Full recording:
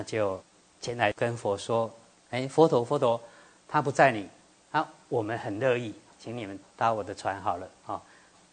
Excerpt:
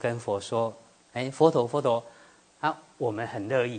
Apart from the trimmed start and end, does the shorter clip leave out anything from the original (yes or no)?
yes